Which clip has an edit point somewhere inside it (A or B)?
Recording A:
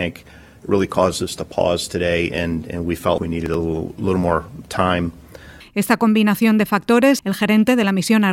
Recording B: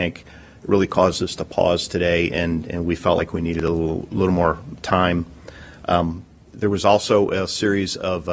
A